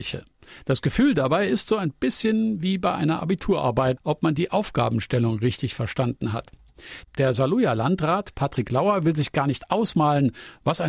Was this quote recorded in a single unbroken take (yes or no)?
no